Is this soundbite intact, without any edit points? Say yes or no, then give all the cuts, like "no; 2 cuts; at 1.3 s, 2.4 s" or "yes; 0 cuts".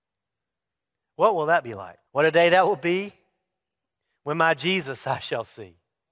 no; 1 cut; at 2.1 s